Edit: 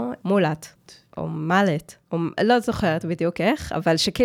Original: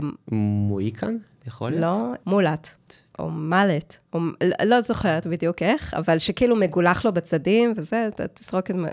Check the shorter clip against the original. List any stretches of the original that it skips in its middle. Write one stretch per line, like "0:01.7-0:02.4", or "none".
0:04.4-0:04.6